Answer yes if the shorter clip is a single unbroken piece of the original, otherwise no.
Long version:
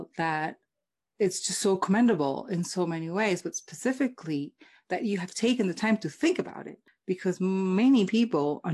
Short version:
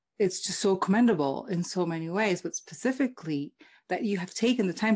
yes